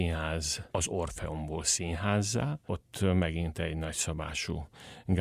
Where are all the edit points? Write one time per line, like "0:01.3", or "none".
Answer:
none